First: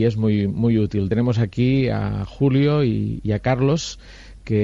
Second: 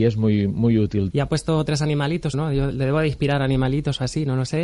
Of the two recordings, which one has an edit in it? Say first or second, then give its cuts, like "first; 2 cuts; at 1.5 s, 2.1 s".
second; 2 cuts; at 1.1 s, 2.3 s